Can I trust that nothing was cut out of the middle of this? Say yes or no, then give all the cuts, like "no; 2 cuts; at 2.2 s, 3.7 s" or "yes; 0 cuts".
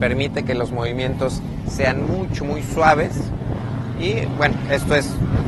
yes; 0 cuts